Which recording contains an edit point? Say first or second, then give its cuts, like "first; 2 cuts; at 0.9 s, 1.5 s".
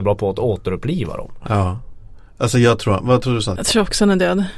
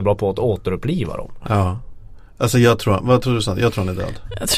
first; 1 cut; at 3.6 s